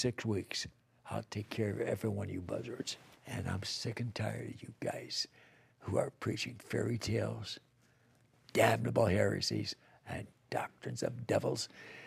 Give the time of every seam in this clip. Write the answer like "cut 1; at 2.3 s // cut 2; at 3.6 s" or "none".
cut 1; at 3.1 s